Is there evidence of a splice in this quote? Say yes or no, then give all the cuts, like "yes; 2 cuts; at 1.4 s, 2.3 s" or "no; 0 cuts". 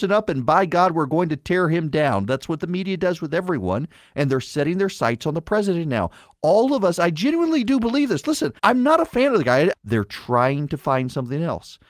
yes; 2 cuts; at 8.6 s, 9.7 s